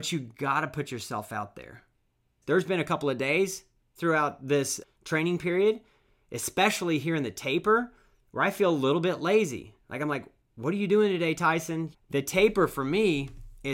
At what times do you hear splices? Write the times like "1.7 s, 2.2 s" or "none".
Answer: 2.4 s, 11.9 s